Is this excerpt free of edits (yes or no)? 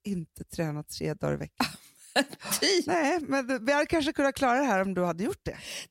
yes